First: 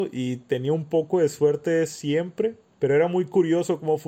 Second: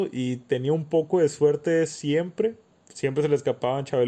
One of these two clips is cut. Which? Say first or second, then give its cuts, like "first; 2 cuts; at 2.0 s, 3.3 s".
first; 1 cut; at 2.7 s